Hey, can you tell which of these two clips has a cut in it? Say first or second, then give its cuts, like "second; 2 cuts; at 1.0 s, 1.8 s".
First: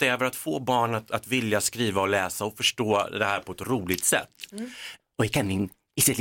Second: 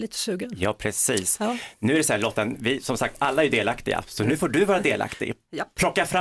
first; 1 cut; at 5.0 s